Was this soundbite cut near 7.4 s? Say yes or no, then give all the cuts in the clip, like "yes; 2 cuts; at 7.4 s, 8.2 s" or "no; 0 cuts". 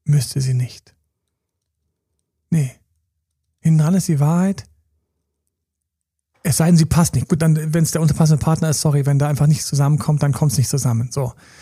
yes; 1 cut; at 7.4 s